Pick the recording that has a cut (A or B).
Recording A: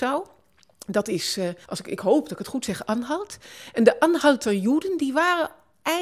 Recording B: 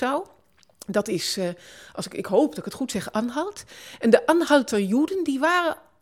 A